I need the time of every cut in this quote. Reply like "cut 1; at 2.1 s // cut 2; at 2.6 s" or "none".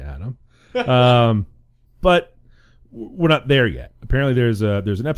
cut 1; at 1.9 s